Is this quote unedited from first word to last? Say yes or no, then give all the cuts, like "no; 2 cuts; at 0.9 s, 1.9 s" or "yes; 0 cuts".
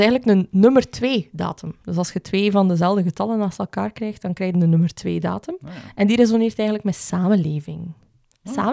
yes; 0 cuts